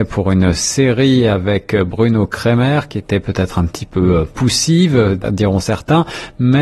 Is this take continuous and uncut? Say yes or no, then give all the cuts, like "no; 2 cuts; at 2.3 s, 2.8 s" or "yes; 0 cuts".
no; 1 cut; at 5.2 s